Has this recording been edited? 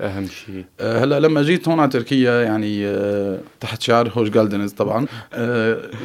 yes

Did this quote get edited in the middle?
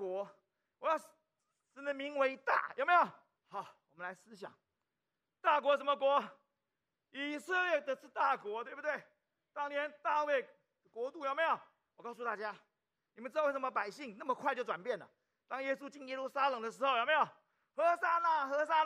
yes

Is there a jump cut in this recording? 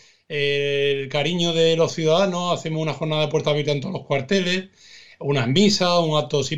no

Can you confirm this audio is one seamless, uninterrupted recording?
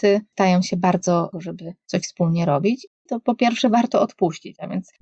no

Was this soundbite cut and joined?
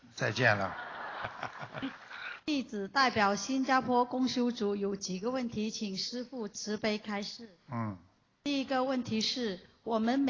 yes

